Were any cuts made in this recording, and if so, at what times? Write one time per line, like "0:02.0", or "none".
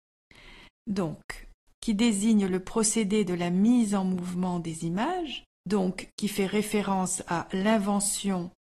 0:01.6
0:05.5

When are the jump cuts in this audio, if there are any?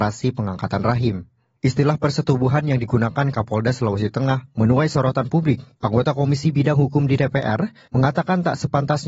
0:07.9

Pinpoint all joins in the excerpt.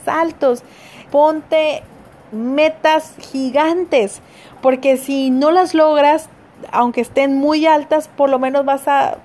0:01.0

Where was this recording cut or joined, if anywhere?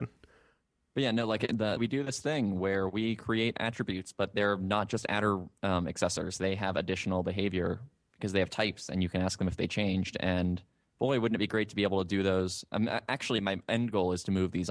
0:01.8

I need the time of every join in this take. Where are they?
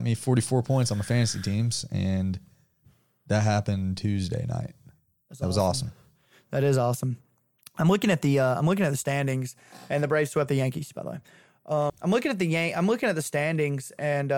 0:11.9

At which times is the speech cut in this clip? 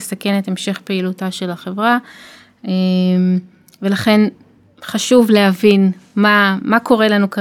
none

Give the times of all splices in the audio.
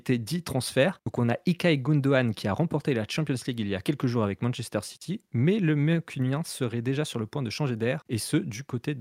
none

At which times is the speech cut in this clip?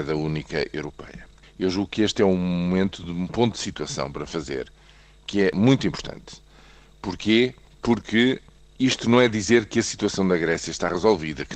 0:01.4

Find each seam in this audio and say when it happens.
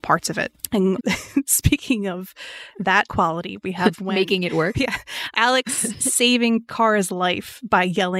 0:01.0
0:04.7

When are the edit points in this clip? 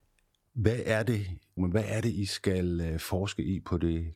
0:01.6

